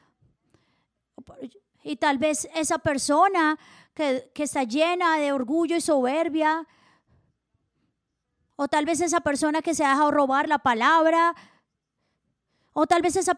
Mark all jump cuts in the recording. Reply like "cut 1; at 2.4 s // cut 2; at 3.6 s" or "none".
none